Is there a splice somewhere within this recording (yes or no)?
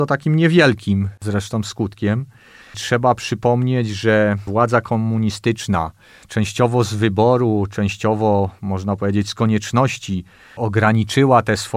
yes